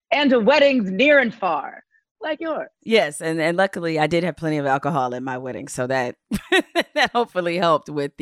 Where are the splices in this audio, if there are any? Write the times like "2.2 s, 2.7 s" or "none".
none